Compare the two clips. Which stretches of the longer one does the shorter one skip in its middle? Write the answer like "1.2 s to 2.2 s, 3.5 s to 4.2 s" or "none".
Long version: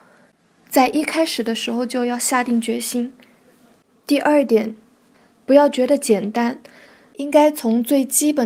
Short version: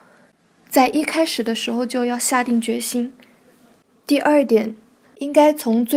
5.0 s to 7.0 s